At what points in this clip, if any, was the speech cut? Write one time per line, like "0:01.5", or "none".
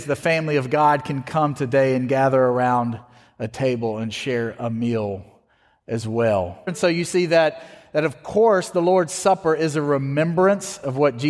0:06.7